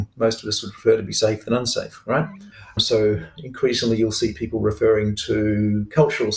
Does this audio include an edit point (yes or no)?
yes